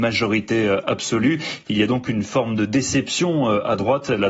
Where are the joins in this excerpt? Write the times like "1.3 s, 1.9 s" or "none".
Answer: none